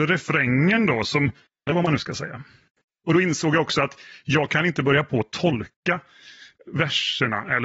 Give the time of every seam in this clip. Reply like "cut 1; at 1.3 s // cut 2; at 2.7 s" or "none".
cut 1; at 1.7 s